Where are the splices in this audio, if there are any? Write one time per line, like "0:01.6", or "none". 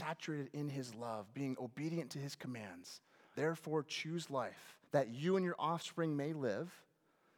0:03.4
0:04.9